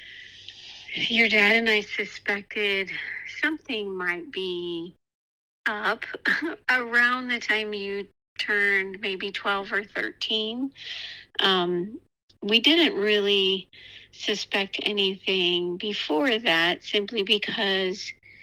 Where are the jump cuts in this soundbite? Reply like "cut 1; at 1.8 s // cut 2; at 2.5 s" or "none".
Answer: none